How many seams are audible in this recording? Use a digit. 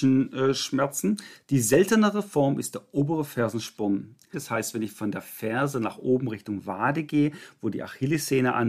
1